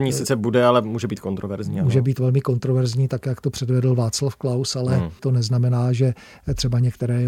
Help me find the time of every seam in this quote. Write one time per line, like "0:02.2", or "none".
0:05.2